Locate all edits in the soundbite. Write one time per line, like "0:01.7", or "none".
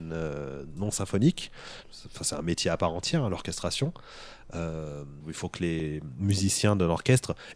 0:01.8
0:05.2